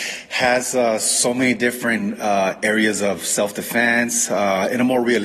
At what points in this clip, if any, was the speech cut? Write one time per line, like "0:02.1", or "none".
none